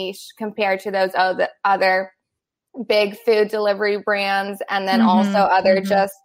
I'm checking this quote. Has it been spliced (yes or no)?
no